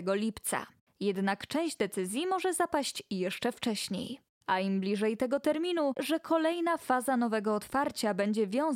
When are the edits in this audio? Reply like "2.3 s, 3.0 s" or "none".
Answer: 6.0 s